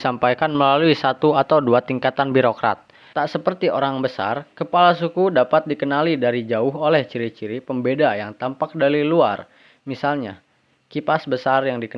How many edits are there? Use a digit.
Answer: 1